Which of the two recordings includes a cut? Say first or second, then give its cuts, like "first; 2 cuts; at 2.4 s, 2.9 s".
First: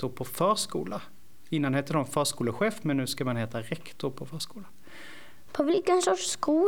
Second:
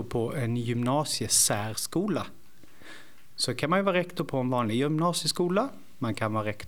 first; 1 cut; at 5.5 s